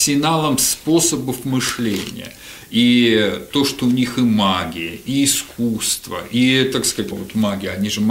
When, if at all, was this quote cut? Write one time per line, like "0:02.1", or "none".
0:07.1